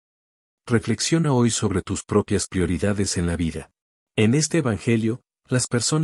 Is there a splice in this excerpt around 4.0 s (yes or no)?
yes